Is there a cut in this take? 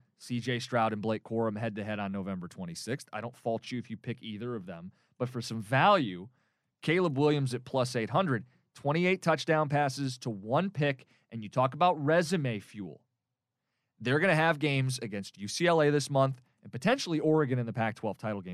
no; 0 cuts

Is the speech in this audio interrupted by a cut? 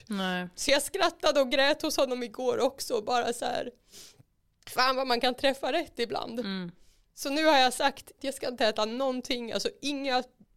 yes; 1 cut; at 8.2 s

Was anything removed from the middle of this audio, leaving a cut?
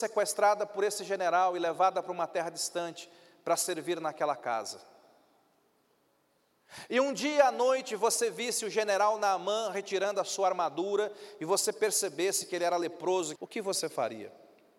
yes; 1 cut; at 13.4 s

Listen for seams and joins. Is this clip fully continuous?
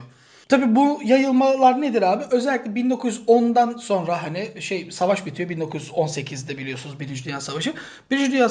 yes; 0 cuts

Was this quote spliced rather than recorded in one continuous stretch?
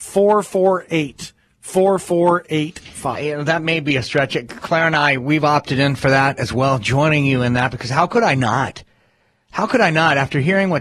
yes; 1 cut; at 3.2 s

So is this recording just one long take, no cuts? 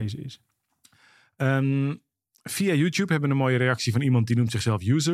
yes; 0 cuts

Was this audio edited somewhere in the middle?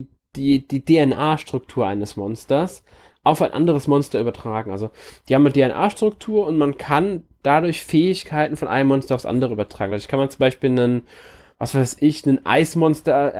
no; 0 cuts

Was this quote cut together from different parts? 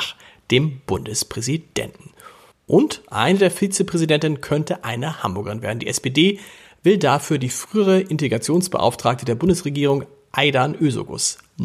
yes; 1 cut; at 2.5 s

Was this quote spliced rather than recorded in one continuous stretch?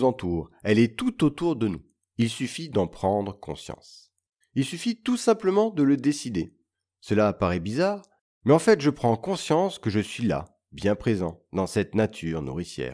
yes; 2 cuts; at 4.4 s, 6.8 s

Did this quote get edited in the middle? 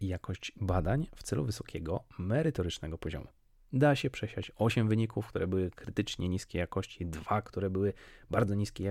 no; 0 cuts

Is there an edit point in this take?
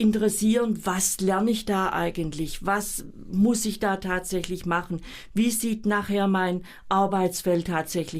no; 0 cuts

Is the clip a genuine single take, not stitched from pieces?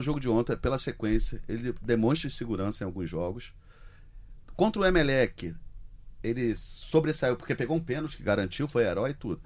yes; 0 cuts

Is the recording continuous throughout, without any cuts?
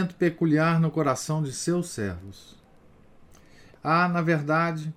no; 1 cut; at 3.8 s

